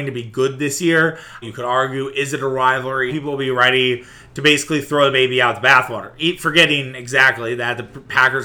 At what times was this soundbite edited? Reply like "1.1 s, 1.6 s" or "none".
1.4 s, 3.1 s